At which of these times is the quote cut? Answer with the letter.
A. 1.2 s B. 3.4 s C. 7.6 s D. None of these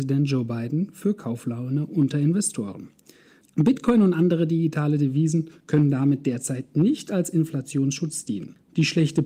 B